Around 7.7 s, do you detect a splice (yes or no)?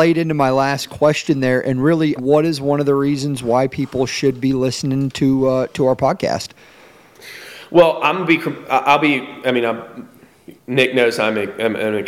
no